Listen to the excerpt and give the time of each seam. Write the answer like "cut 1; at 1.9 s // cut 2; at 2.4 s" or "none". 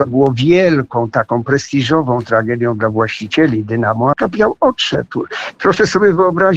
cut 1; at 4.1 s